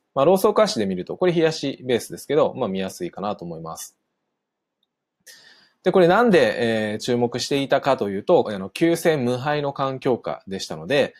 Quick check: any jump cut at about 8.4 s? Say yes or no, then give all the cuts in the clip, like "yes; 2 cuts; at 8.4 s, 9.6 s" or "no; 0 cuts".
yes; 1 cut; at 8.4 s